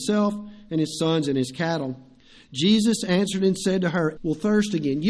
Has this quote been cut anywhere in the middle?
yes; 1 cut; at 4.2 s

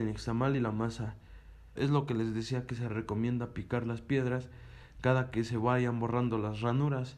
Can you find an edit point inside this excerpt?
yes; 1 cut; at 1.8 s

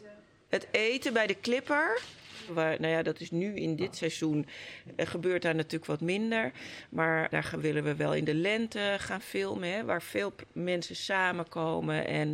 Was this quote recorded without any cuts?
no; 1 cut; at 2.5 s

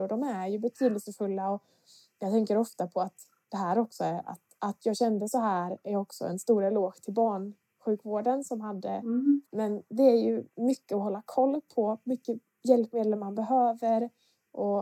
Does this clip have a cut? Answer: yes; 1 cut; at 9.4 s

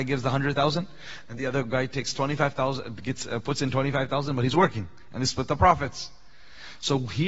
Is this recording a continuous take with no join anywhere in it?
yes; 0 cuts

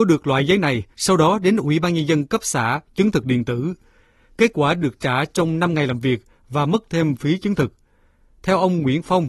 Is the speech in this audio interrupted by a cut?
yes; 1 cut; at 0.9 s

